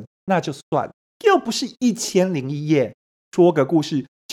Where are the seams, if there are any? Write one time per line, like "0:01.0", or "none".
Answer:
0:01.1

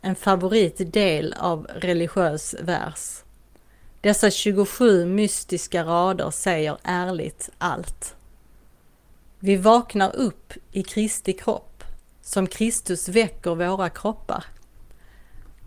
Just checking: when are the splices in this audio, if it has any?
none

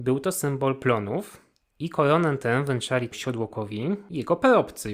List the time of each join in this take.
none

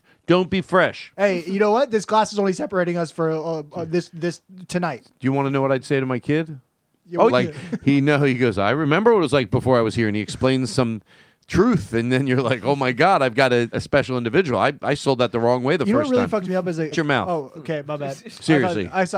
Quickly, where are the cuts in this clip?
0:07.3
0:13.7
0:16.9

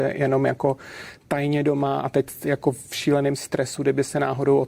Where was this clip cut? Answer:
none

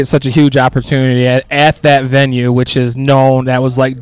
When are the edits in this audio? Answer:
none

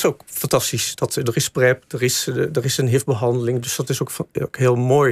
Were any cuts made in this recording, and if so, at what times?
none

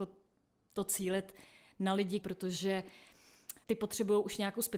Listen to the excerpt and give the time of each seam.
0:02.2
0:03.6

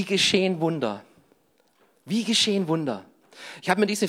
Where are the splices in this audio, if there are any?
none

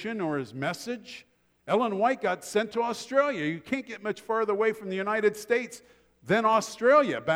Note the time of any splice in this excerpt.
none

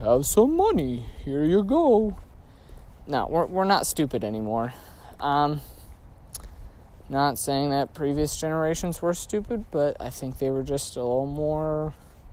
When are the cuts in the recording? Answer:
none

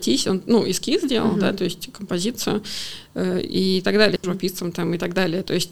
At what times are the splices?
0:04.2

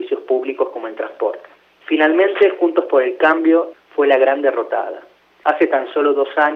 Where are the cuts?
0:03.7

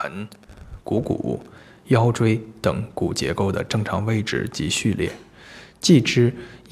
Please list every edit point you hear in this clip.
none

